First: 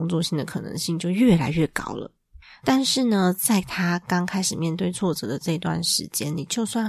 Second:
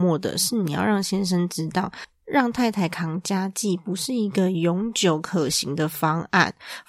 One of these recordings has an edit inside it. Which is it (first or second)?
first